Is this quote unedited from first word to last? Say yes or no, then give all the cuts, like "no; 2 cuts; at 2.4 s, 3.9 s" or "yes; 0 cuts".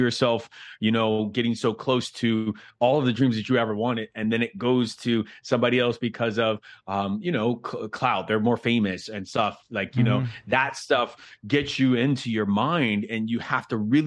yes; 0 cuts